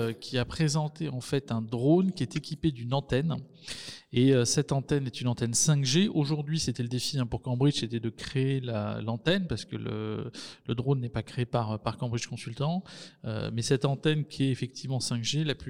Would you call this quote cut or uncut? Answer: uncut